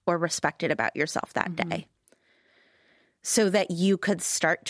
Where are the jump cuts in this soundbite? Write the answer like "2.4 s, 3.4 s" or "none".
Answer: none